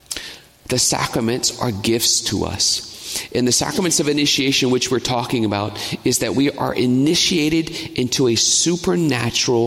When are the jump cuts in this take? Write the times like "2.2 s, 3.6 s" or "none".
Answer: none